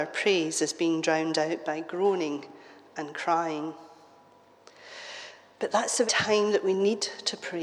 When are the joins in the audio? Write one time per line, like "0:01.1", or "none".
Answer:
0:06.1

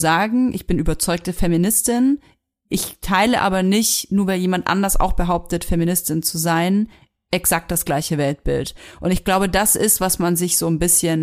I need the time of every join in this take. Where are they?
none

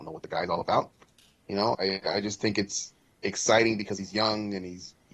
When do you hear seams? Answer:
0:01.7

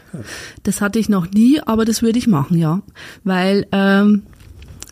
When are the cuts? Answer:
none

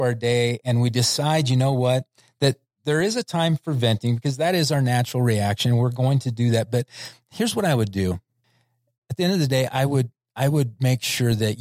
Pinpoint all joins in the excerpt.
none

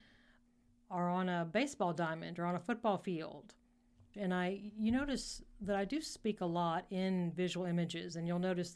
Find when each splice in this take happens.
0:04.1

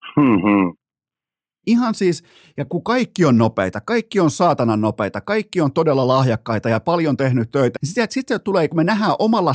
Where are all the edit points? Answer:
0:01.6
0:07.7

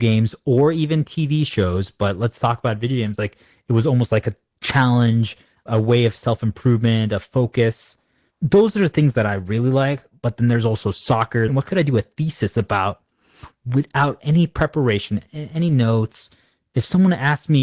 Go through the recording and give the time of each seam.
0:11.5

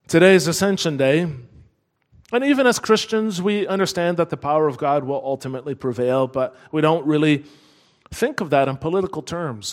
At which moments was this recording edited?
0:02.1

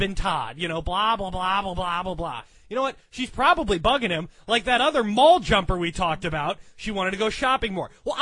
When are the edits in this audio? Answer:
none

